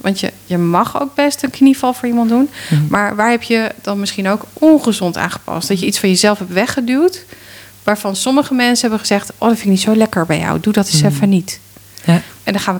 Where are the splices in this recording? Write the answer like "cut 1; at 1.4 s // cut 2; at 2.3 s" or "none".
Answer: none

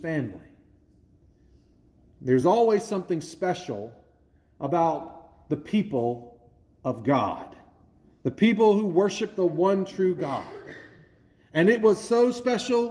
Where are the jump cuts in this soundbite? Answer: none

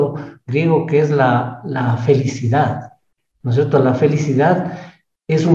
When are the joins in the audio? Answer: none

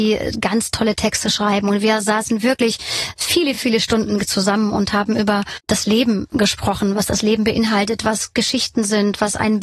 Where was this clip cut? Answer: none

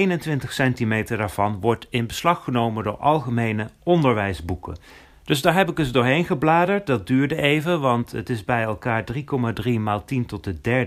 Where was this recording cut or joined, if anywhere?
none

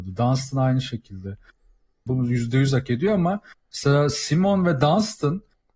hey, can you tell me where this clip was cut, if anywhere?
cut 1; at 2.1 s

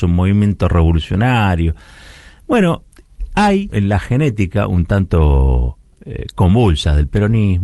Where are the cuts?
cut 1; at 3.7 s

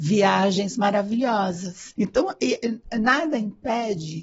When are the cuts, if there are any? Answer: cut 1; at 2.0 s

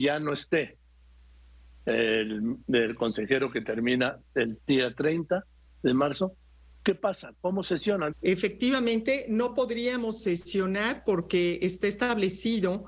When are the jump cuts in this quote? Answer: cut 1; at 8.1 s

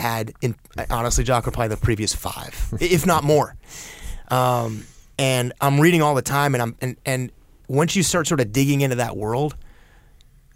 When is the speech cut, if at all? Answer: none

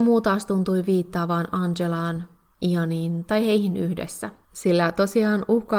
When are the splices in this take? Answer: none

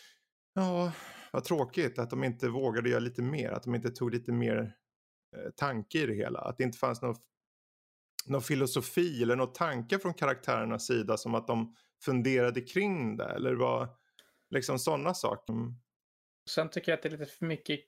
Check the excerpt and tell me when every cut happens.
cut 1; at 15.5 s

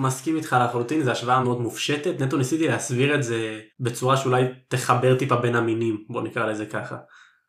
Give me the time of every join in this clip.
cut 1; at 1.4 s // cut 2; at 3.7 s

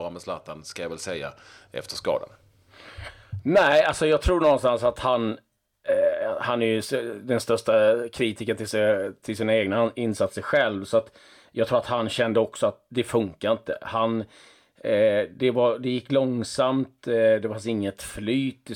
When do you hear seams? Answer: none

